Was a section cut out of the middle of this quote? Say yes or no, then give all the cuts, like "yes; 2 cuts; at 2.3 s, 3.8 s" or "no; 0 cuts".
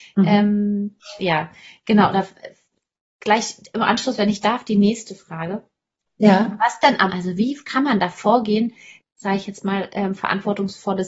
yes; 2 cuts; at 7.1 s, 9.0 s